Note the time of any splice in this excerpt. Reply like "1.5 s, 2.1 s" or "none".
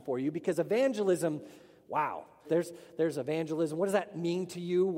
2.4 s